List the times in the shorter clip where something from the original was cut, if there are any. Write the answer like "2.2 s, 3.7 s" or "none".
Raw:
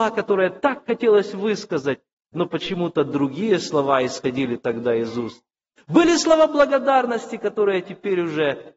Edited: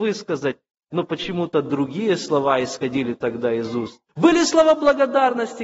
4.1 s